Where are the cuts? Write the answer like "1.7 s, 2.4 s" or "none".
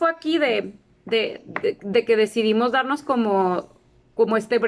none